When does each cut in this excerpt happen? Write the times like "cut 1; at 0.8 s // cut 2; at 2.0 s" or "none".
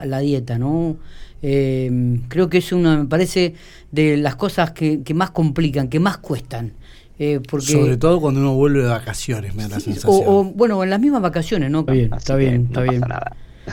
cut 1; at 11.9 s